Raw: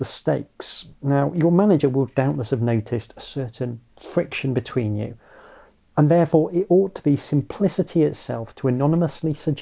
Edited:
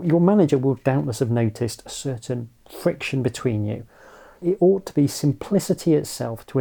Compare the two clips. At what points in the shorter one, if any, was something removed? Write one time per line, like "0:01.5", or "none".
0:04.4